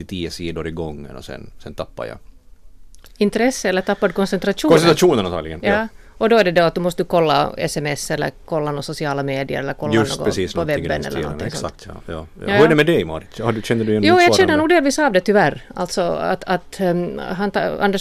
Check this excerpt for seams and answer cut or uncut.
uncut